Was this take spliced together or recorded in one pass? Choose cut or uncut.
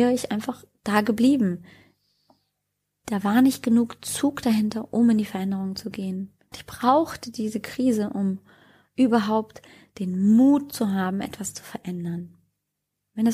cut